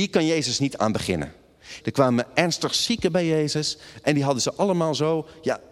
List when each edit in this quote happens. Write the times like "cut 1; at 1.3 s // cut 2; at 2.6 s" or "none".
cut 1; at 1.8 s